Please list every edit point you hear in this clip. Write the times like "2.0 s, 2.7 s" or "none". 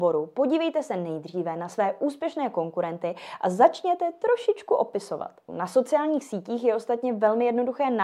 5.5 s